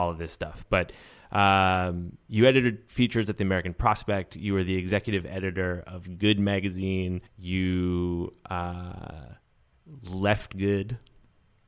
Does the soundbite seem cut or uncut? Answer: cut